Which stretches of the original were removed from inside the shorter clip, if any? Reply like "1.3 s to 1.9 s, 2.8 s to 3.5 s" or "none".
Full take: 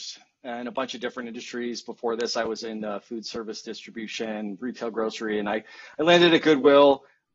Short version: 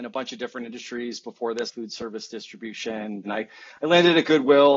2.3 s to 3.0 s, 4.6 s to 5.4 s